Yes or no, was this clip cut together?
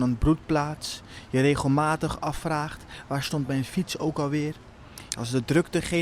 yes